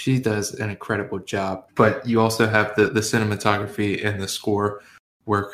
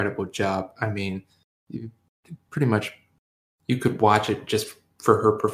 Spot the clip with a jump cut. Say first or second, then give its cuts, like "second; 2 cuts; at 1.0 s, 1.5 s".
first; 1 cut; at 1.7 s